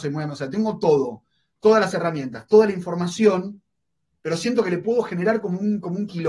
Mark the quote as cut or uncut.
uncut